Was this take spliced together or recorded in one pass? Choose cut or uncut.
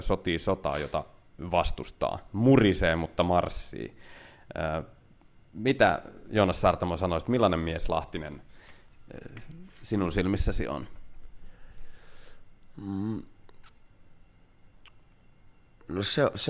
uncut